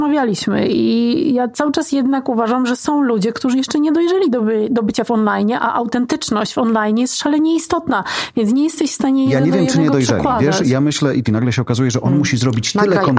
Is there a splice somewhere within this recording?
yes; 1 cut; at 11.2 s

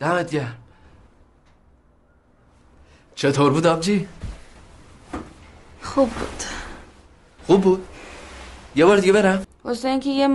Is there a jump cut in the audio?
yes; 1 cut; at 9.4 s

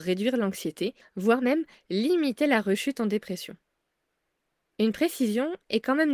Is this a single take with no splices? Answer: no; 1 cut; at 1.0 s

